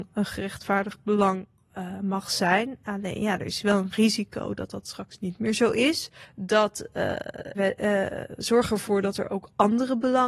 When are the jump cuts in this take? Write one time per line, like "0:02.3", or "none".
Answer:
0:07.5